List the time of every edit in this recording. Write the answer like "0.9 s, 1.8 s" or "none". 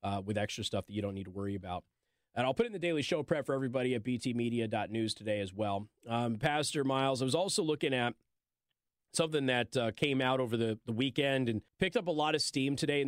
11.7 s